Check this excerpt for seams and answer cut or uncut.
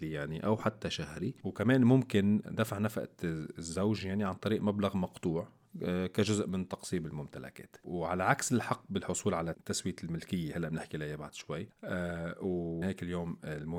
cut